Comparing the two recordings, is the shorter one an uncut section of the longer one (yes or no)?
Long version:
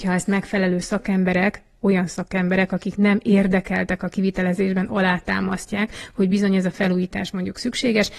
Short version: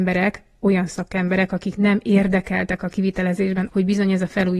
no